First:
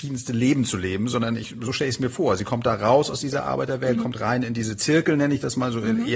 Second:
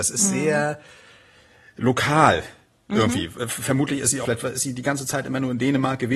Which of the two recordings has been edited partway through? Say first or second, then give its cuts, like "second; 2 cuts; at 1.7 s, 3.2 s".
second; 1 cut; at 4.2 s